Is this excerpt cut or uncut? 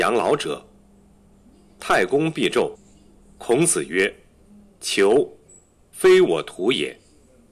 cut